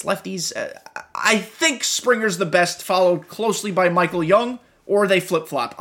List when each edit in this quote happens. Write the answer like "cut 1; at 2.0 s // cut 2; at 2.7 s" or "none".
none